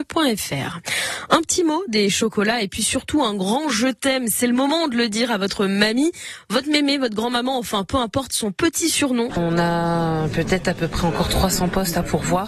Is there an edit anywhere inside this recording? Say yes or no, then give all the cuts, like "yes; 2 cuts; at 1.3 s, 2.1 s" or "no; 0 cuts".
yes; 2 cuts; at 1.9 s, 9.3 s